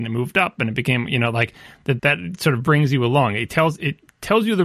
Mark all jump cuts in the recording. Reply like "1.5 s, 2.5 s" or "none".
2.0 s